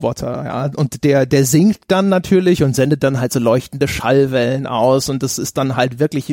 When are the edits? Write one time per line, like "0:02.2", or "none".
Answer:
none